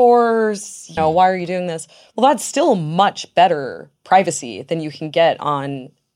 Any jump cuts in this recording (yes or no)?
yes